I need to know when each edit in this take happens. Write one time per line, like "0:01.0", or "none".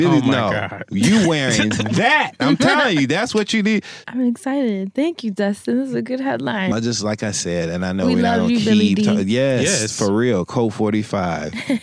0:04.0
0:06.7